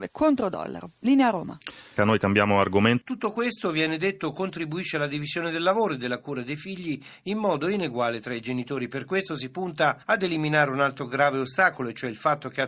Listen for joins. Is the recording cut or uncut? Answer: cut